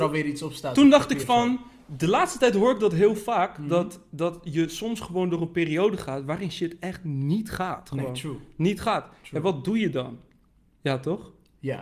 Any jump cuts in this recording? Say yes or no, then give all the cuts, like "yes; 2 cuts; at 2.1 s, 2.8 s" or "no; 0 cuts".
no; 0 cuts